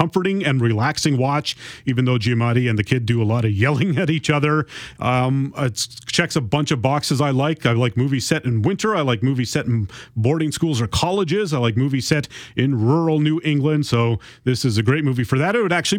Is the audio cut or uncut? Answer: cut